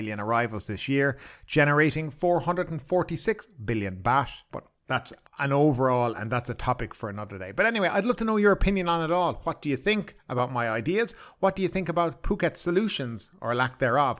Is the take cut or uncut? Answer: cut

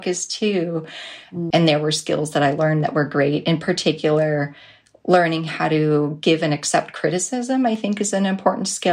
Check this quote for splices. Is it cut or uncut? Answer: cut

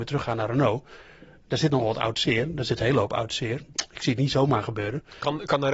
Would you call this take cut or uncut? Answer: uncut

